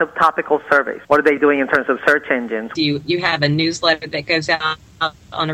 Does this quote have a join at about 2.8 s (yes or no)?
yes